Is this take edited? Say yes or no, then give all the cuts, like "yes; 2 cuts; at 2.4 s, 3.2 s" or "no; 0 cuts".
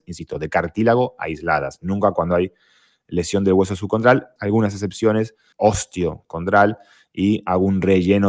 yes; 2 cuts; at 4.4 s, 5.5 s